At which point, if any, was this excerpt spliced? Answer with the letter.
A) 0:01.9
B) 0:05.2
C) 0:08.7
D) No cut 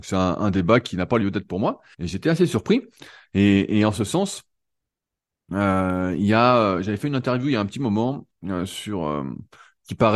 A